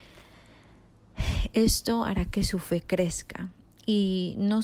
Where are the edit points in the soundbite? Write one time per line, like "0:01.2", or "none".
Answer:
none